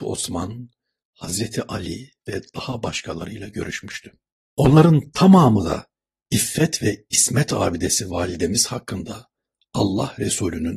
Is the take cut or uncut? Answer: uncut